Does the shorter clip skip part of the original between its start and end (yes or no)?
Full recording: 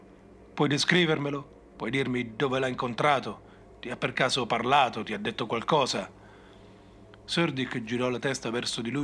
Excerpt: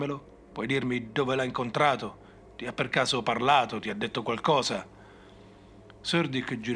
no